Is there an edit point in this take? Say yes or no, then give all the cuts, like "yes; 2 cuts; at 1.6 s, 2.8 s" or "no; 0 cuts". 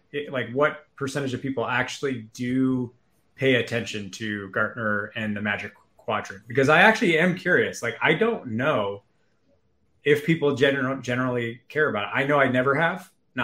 no; 0 cuts